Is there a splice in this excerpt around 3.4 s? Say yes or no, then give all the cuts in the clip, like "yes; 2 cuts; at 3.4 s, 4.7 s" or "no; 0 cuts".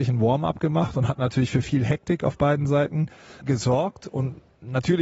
yes; 1 cut; at 3.4 s